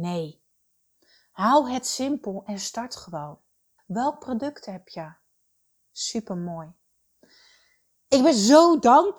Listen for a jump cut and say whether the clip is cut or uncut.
cut